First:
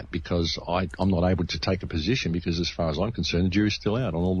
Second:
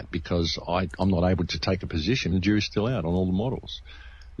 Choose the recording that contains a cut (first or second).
second